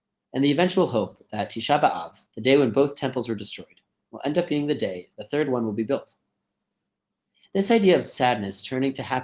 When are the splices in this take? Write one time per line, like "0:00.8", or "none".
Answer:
0:02.3